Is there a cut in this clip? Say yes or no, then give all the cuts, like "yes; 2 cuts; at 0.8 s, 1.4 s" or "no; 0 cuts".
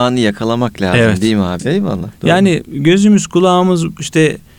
yes; 1 cut; at 1.6 s